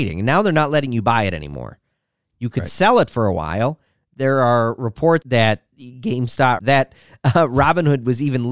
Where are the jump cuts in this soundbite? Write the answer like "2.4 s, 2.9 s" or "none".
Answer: 5.2 s, 6.6 s